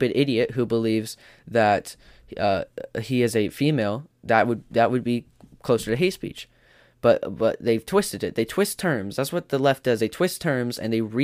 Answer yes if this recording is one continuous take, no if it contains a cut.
yes